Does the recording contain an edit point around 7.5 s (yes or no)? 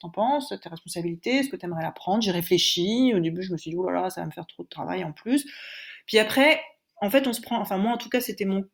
no